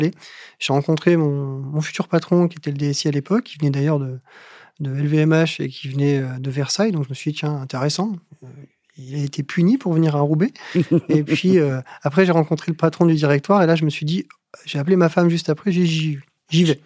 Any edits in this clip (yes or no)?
no